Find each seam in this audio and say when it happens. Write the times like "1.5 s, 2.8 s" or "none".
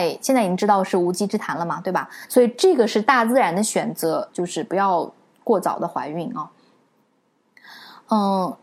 2.3 s, 4.3 s

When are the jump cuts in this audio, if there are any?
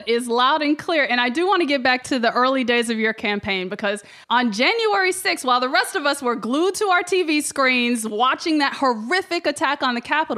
4.2 s

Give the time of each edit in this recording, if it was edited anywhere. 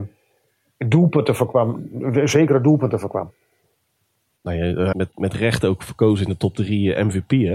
4.9 s

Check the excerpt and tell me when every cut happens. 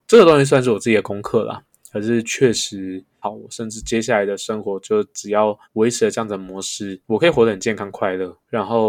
3.2 s, 5.6 s

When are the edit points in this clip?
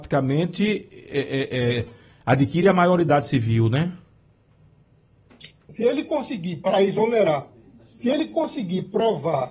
5.7 s

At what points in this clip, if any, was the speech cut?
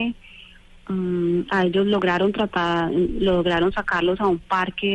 none

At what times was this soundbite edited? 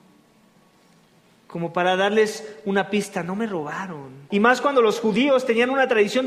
4.3 s

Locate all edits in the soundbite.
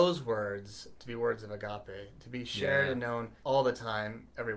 3.4 s

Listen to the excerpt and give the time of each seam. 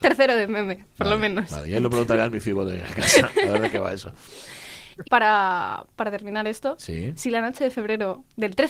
5.0 s

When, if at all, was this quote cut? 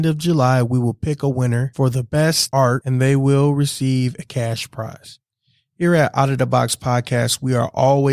none

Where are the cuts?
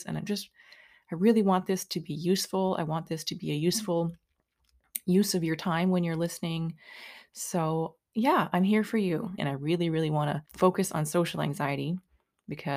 9.4 s, 10.5 s

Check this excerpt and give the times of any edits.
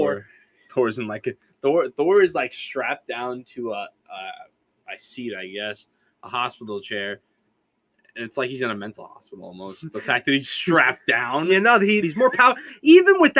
10.4 s, 12.0 s

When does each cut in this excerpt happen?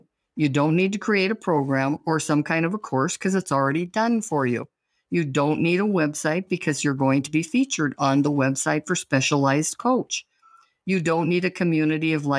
none

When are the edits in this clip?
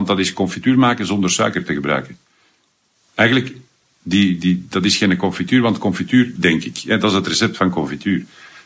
6.4 s

